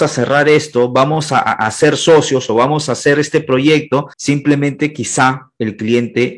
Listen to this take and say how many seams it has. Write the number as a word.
two